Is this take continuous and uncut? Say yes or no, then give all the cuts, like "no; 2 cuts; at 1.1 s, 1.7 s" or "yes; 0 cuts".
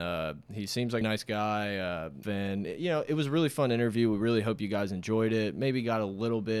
no; 2 cuts; at 1.0 s, 2.2 s